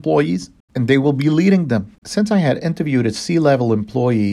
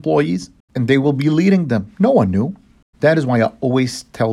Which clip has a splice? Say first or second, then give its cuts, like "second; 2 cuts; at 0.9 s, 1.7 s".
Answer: first; 1 cut; at 1.9 s